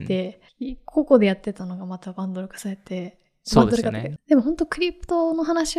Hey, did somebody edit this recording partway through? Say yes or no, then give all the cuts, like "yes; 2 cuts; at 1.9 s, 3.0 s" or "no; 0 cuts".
yes; 1 cut; at 4.2 s